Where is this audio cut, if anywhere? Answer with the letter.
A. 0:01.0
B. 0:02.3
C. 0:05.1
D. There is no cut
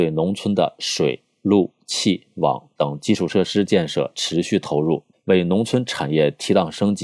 C